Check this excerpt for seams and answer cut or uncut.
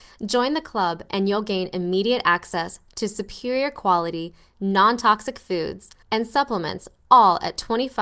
cut